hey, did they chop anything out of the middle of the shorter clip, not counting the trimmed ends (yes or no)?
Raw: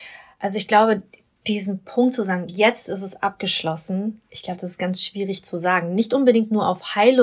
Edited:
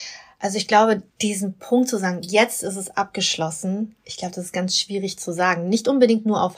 yes